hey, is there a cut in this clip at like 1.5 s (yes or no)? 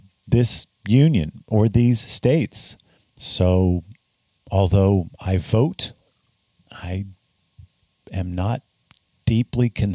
no